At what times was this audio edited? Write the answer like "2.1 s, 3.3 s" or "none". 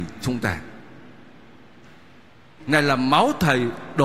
2.6 s